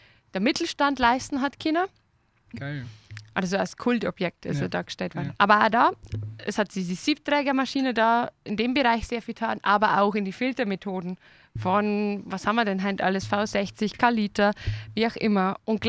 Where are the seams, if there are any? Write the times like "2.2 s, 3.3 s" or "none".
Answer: 2.5 s, 5.3 s